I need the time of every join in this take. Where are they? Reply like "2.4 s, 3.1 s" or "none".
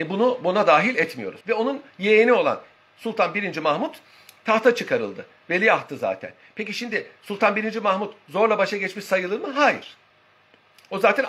1.4 s

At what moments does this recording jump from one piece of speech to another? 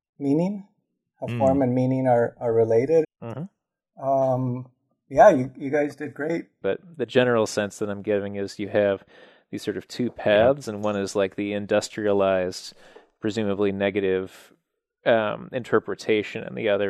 3.0 s, 6.6 s

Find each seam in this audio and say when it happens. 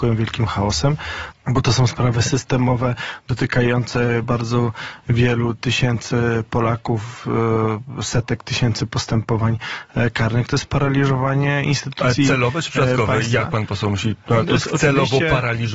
1.3 s, 4.2 s

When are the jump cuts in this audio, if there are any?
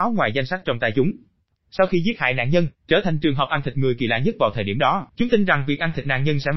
1.5 s, 2.8 s, 5.1 s

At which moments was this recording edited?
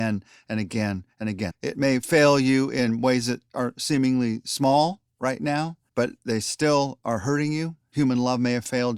1.5 s, 5.9 s, 7.9 s

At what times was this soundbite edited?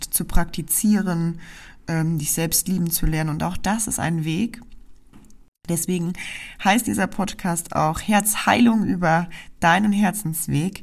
none

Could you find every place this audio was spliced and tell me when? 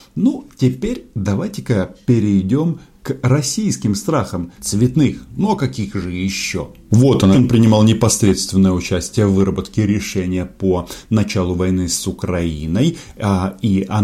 4.6 s, 7.3 s

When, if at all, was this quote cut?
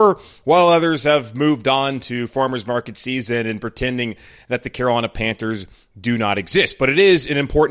none

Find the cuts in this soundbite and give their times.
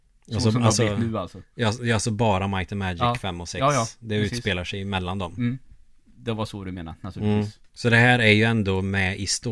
7.7 s

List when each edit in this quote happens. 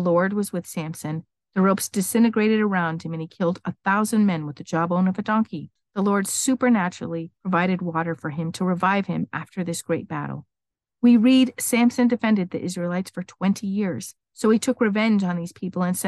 14.3 s

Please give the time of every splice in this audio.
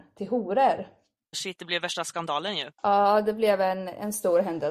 1.3 s, 2.8 s

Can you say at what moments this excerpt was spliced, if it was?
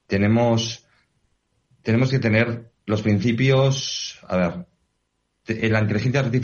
none

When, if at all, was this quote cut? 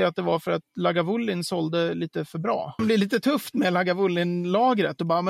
2.8 s

